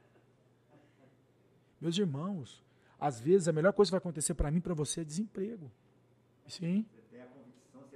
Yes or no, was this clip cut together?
yes